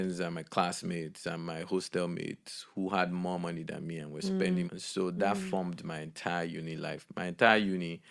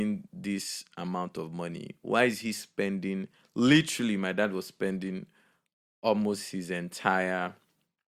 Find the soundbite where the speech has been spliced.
first; 1 cut; at 4.7 s

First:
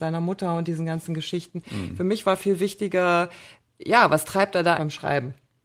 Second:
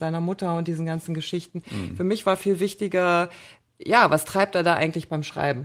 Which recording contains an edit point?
first; 1 cut; at 4.8 s

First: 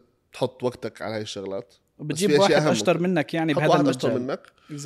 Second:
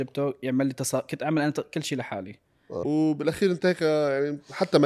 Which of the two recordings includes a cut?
second; 1 cut; at 2.8 s

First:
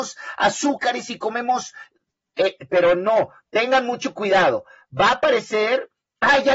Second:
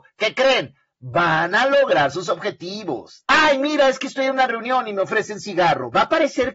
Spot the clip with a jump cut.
second; 1 cut; at 3.2 s

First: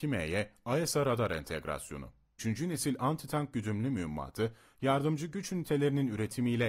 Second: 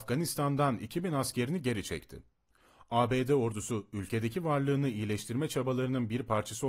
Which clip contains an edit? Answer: first; 1 cut; at 2.4 s

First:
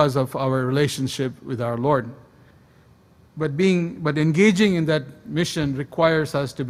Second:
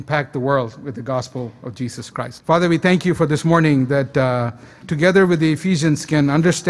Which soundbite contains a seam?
second; 2 cuts; at 2.4 s, 4.8 s

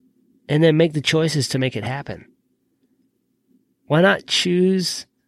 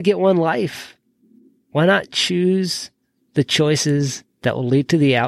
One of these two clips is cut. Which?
first; 1 cut; at 3.8 s

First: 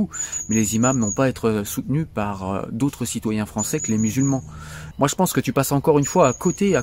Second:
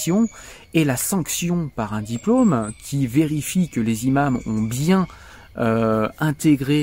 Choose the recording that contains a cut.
first; 1 cut; at 4.9 s

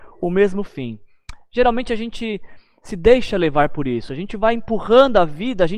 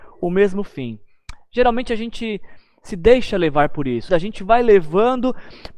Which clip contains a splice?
second; 1 cut; at 4.1 s

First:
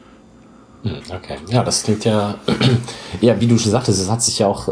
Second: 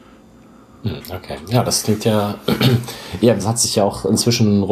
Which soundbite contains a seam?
second; 1 cut; at 3.4 s

